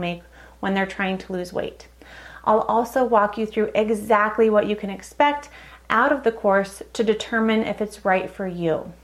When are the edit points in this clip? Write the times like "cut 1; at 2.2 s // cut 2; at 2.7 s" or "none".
none